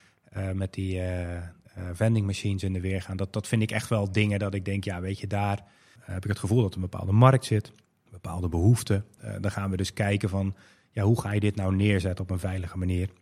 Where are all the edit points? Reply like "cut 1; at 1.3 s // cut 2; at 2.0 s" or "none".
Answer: none